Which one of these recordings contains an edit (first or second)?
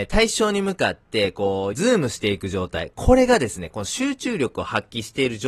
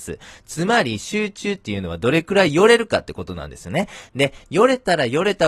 first